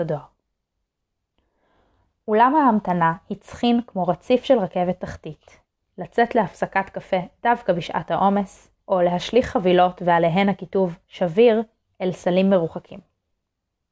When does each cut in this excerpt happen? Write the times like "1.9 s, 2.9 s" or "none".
5.8 s, 8.8 s